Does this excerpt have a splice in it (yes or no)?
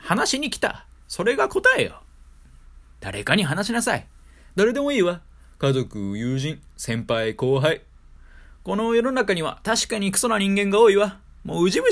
no